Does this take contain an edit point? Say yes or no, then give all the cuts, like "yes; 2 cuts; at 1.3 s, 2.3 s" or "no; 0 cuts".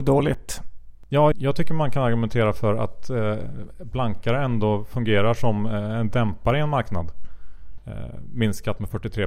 yes; 2 cuts; at 1.3 s, 7.8 s